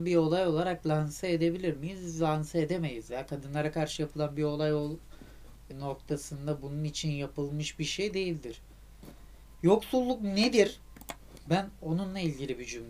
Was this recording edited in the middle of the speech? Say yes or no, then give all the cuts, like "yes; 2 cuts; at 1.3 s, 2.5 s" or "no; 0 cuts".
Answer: yes; 1 cut; at 5.7 s